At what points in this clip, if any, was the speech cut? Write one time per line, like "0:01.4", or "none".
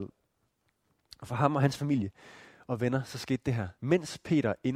0:03.8